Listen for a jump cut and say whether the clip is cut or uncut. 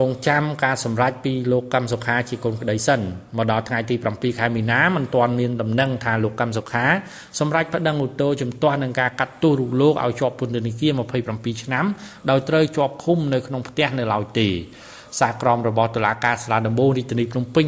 uncut